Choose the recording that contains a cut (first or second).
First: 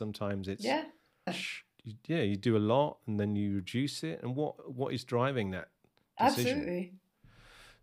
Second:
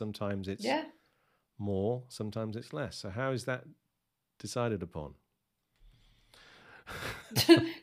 first